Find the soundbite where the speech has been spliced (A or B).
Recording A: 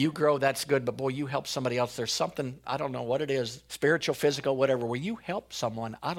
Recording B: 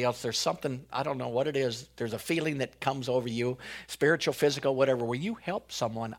A